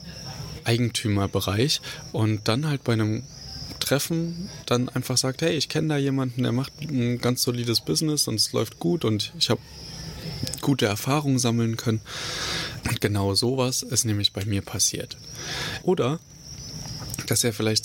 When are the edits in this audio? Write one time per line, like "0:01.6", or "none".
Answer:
0:12.8
0:15.8

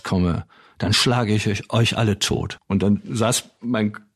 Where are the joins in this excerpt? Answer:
0:02.6

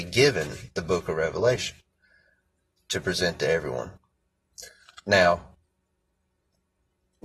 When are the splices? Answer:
none

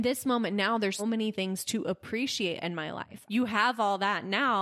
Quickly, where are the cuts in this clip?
0:01.0
0:03.3

